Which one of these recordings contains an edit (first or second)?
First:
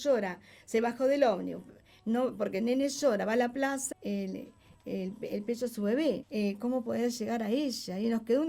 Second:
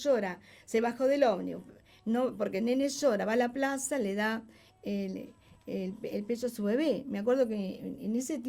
first